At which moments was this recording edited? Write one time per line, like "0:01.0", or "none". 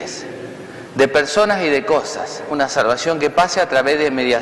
0:02.5